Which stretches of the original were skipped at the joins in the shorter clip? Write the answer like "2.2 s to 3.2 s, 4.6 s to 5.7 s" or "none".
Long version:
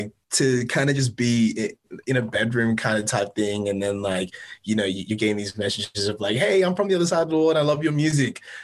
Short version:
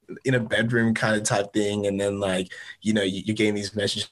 none

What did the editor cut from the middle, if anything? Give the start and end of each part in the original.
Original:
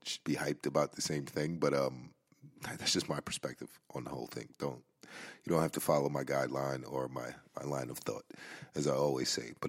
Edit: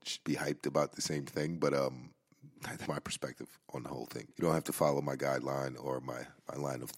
2.9 s to 3.1 s, 4.5 s to 5.4 s

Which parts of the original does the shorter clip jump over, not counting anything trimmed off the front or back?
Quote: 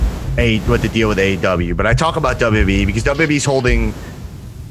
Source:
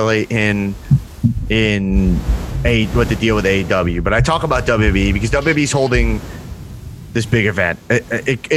none

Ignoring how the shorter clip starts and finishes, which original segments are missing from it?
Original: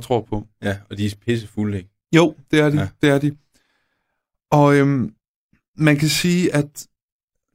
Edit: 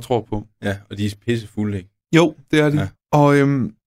2.9 s to 4.3 s

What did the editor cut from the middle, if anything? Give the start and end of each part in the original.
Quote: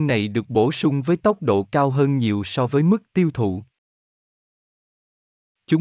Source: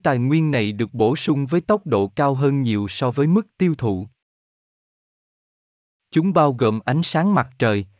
none

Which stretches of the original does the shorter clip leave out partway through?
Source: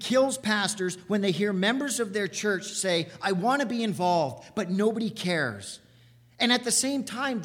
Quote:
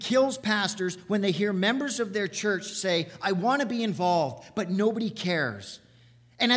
none

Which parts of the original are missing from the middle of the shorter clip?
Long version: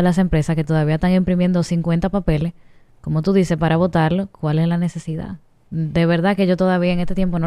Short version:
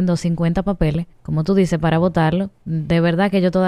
2.6 s to 2.9 s, 4.3 s to 5.6 s

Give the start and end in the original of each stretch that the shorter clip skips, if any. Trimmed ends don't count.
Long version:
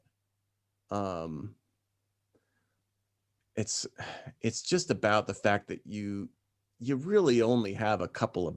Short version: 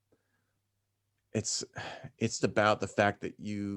4.6 s to 4.9 s

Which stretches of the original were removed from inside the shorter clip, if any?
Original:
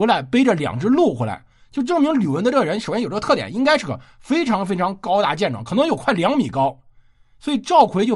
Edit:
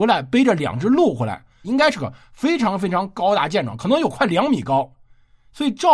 1.6 s to 3.5 s

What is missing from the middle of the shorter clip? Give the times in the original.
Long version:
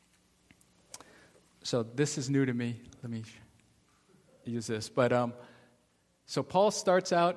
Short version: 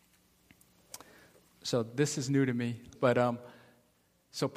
3.0 s to 4.9 s

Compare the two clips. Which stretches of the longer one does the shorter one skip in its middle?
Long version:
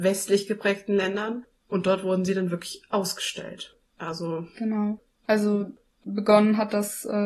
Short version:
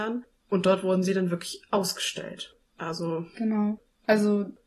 none

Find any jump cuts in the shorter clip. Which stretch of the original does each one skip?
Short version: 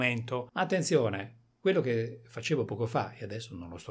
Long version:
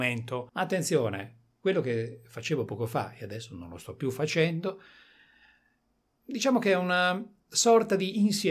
none

